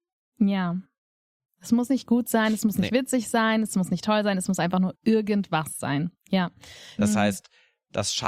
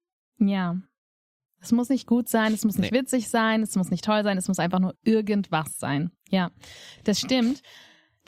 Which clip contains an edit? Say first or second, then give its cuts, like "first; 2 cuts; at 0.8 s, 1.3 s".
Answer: first; 1 cut; at 7.0 s